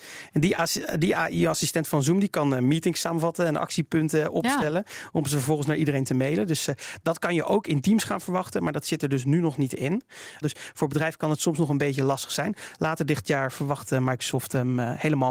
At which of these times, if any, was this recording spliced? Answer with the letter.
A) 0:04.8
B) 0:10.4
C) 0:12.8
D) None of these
B